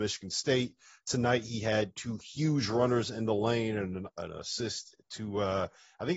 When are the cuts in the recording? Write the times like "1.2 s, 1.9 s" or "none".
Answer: none